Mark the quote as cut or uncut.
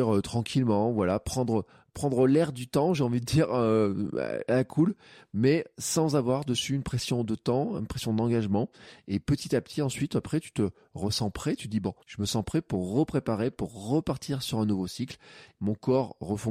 cut